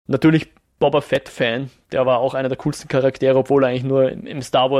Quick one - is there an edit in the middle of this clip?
no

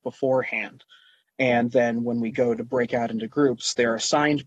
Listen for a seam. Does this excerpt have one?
no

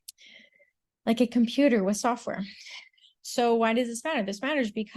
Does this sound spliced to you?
no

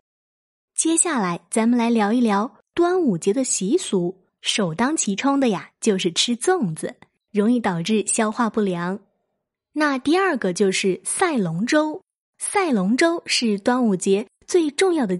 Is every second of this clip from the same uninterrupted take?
no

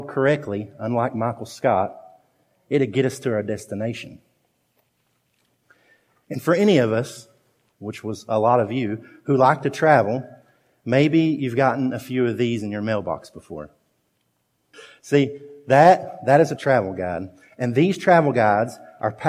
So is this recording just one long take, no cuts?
no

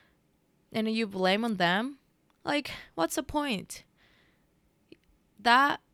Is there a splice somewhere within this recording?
no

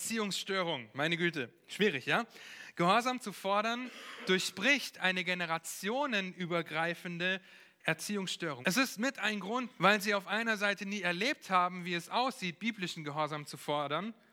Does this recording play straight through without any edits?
no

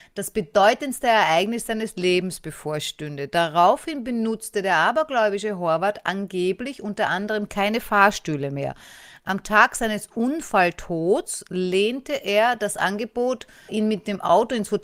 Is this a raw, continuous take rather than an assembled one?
no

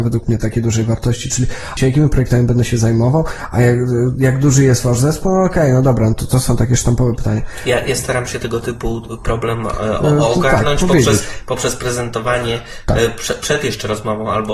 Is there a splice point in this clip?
yes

